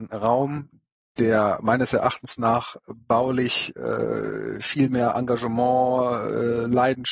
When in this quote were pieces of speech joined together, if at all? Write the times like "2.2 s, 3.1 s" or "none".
none